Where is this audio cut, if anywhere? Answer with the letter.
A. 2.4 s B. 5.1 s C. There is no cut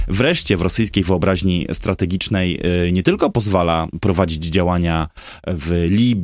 C